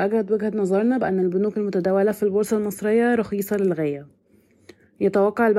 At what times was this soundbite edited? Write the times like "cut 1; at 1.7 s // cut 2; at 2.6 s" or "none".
none